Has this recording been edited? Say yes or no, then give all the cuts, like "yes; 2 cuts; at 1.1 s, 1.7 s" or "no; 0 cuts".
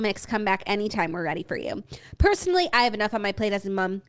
no; 0 cuts